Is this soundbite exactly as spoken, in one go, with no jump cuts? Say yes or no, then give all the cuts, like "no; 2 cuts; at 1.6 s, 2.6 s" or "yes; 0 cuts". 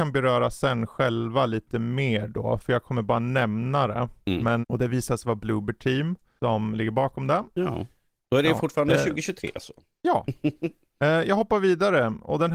no; 2 cuts; at 4.6 s, 7.5 s